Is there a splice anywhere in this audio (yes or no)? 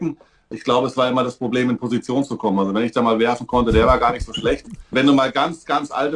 no